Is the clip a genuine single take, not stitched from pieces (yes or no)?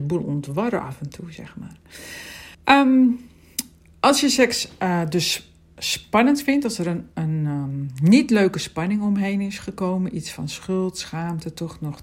no